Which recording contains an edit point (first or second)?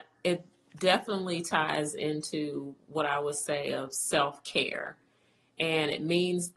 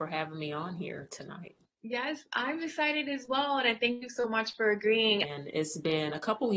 second